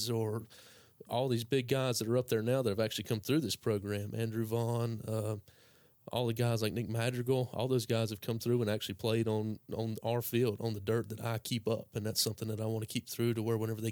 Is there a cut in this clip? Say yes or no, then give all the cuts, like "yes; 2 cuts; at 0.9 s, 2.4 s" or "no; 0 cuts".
no; 0 cuts